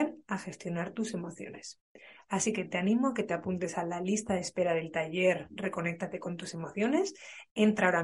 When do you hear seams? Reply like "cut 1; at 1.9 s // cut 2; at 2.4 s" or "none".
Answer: none